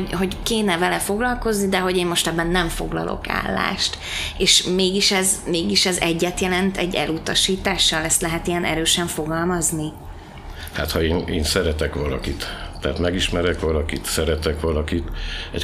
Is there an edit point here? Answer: no; 0 cuts

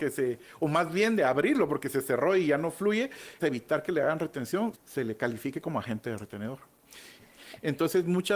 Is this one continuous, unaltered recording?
no; 3 cuts; at 3.4 s, 4.7 s, 7.2 s

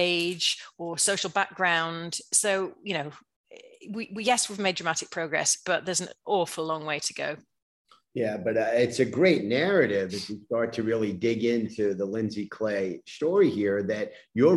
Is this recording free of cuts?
yes; 0 cuts

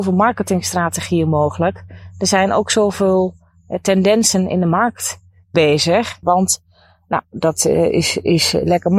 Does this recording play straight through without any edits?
no; 1 cut; at 6.2 s

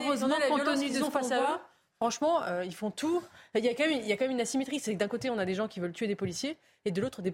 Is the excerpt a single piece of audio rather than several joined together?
yes; 0 cuts

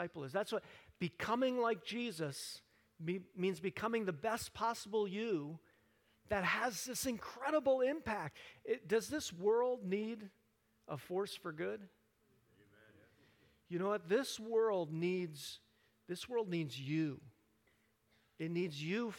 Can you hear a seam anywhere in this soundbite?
no; 0 cuts

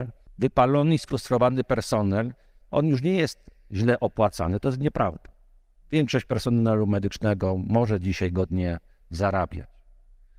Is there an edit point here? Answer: no; 0 cuts

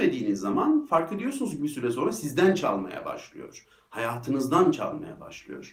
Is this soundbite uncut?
yes; 0 cuts

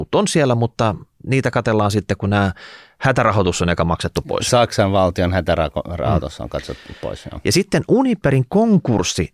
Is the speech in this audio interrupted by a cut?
no; 0 cuts

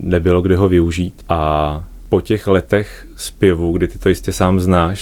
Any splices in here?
no; 0 cuts

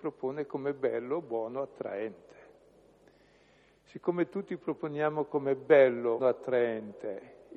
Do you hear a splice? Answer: yes; 1 cut; at 6.2 s

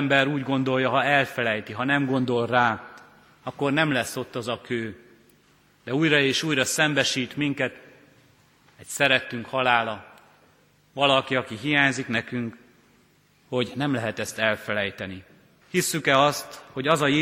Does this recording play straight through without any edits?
no; 1 cut; at 15.6 s

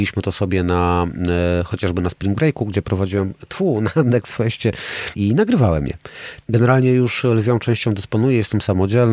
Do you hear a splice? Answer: yes; 2 cuts; at 5.1 s, 6.4 s

